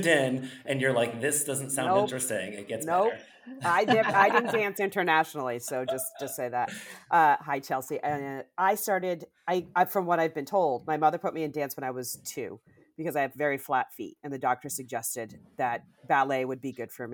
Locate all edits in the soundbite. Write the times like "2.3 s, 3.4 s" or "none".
none